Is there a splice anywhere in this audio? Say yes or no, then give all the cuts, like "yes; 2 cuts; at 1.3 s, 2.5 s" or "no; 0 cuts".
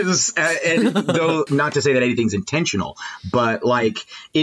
yes; 1 cut; at 1.5 s